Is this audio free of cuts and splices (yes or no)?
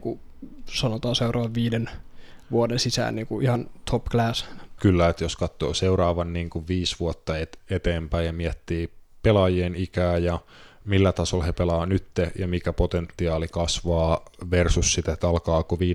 no